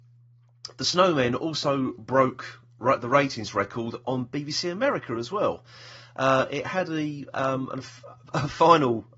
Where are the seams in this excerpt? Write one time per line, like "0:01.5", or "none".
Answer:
none